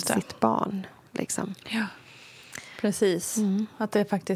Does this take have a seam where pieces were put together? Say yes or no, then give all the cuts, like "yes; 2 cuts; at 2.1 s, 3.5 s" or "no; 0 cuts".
no; 0 cuts